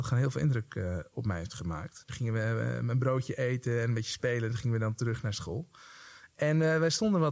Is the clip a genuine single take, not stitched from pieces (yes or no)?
no